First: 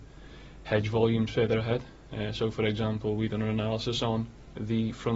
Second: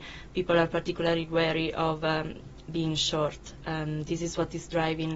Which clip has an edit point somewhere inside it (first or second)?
second